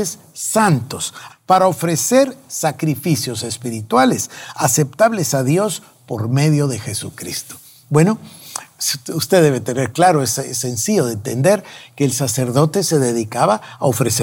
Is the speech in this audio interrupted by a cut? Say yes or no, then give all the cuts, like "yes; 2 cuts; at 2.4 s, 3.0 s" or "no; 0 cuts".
yes; 1 cut; at 1.3 s